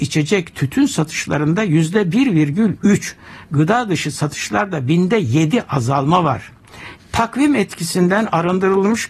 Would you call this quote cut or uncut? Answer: cut